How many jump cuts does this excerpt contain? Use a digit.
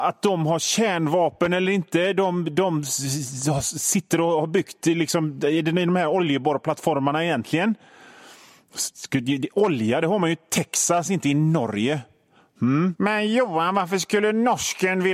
1